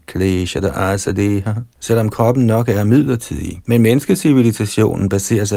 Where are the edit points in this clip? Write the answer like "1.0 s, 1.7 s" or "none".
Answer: 1.7 s, 3.6 s